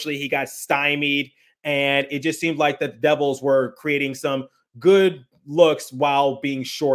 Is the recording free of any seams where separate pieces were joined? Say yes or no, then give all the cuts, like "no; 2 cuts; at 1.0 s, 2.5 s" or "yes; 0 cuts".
yes; 0 cuts